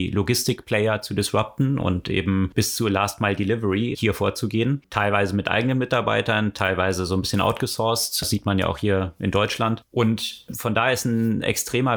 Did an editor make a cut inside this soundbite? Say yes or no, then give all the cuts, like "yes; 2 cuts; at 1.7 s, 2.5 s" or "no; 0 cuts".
no; 0 cuts